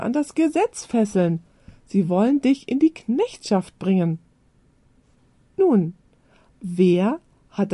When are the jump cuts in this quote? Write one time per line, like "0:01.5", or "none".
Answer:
none